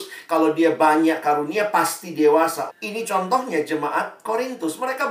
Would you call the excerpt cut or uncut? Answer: cut